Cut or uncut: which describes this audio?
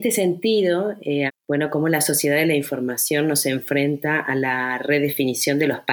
cut